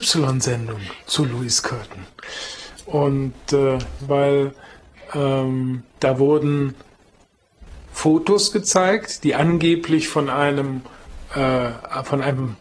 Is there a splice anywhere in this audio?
yes; 2 cuts; at 4.0 s, 5.9 s

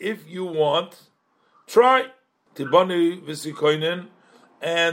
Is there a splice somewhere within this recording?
yes; 1 cut; at 2.5 s

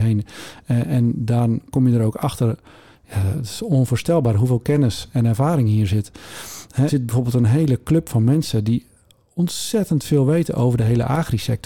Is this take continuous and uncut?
no; 1 cut; at 6.9 s

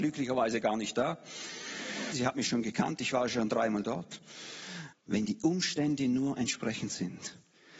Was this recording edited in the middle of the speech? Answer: yes; 2 cuts; at 2.1 s, 4.9 s

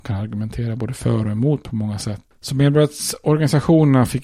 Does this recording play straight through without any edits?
no; 1 cut; at 2.3 s

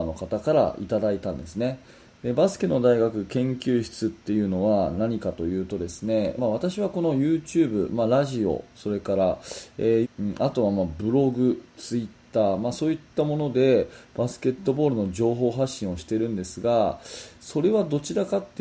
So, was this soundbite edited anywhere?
yes; 2 cuts; at 6.4 s, 10.0 s

